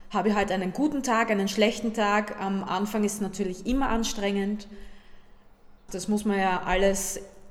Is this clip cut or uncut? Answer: cut